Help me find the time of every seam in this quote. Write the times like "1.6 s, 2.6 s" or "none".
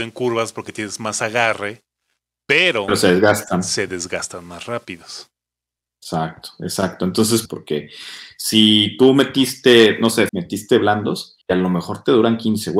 7.5 s, 10.3 s, 11.4 s